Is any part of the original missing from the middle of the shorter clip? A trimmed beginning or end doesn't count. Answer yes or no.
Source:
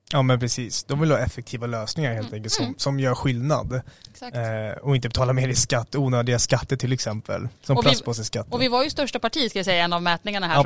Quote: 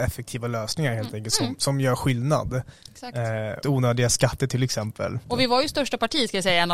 yes